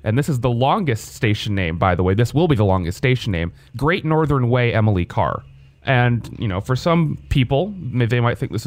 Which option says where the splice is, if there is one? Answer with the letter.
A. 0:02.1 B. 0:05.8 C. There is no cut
B